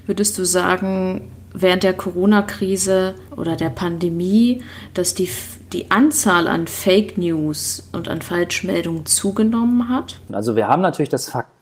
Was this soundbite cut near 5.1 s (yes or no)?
no